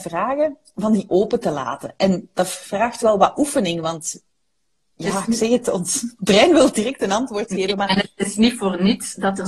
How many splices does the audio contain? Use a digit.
0